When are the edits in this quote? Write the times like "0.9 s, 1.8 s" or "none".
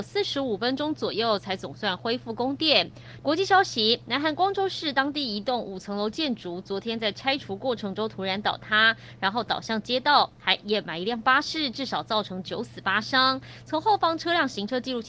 3.2 s